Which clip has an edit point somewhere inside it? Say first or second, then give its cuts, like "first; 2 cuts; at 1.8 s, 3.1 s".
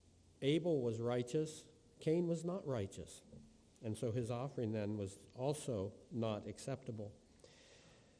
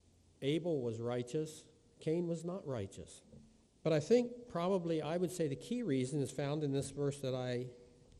second; 1 cut; at 3.7 s